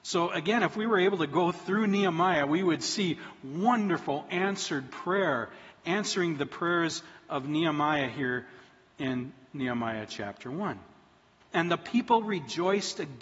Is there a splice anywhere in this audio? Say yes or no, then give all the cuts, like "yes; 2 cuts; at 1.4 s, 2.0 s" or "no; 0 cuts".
yes; 1 cut; at 11.4 s